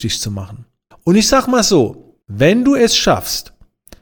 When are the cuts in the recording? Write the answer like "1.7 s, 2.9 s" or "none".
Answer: 0.9 s, 2.2 s